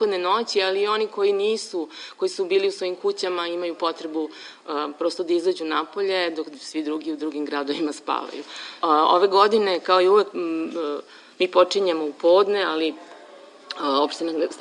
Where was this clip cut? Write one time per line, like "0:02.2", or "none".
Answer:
0:08.8